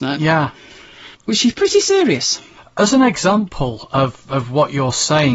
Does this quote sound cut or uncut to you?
cut